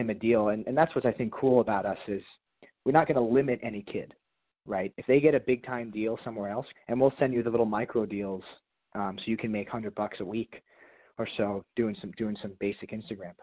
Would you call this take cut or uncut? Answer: cut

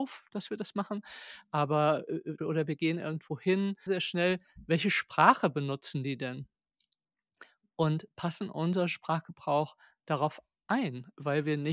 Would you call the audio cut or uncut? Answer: cut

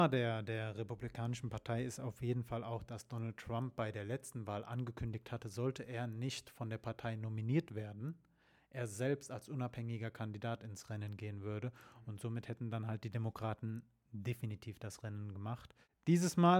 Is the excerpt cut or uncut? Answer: uncut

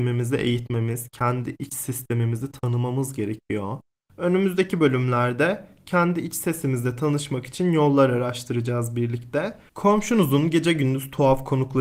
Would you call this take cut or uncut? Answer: cut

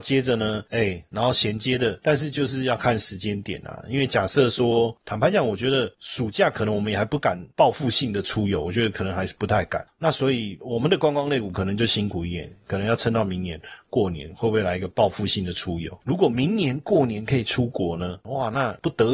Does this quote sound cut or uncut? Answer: cut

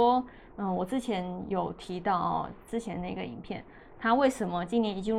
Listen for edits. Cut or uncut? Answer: uncut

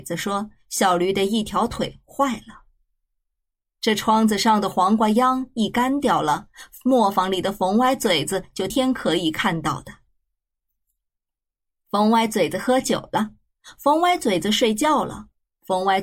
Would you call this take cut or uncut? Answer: cut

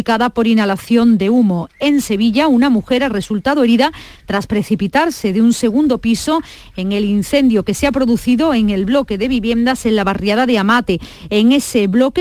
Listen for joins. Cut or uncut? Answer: uncut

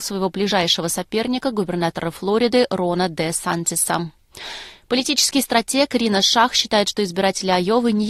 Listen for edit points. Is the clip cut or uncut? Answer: uncut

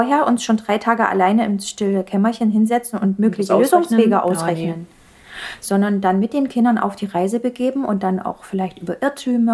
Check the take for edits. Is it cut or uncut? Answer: uncut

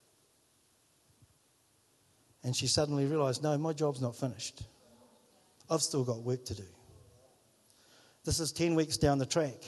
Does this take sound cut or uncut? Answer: uncut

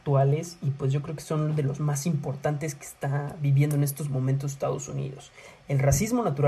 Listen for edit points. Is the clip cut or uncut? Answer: uncut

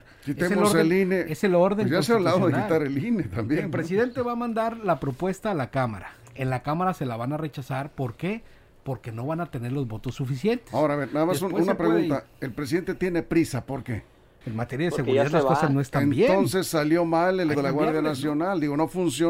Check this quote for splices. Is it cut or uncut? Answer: cut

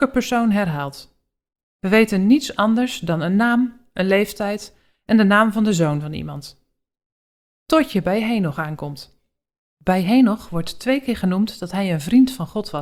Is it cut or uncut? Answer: uncut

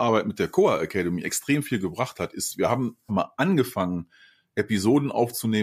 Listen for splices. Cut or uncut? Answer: cut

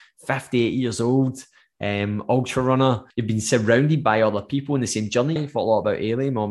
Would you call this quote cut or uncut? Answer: cut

